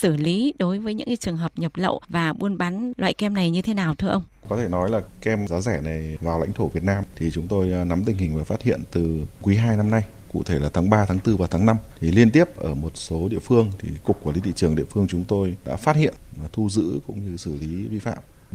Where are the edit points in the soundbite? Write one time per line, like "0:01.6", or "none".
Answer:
none